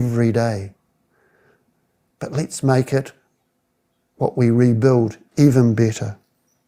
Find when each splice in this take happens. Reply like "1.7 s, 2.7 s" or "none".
2.1 s